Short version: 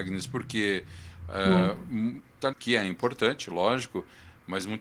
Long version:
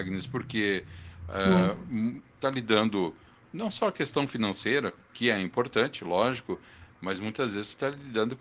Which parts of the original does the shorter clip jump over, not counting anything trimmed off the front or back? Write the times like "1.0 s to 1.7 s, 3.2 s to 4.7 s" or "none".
2.5 s to 5.1 s